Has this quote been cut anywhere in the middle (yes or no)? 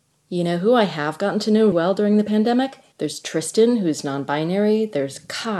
yes